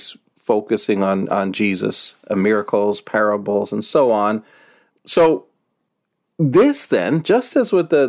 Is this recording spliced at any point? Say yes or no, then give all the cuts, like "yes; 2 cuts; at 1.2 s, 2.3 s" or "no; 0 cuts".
yes; 1 cut; at 4.9 s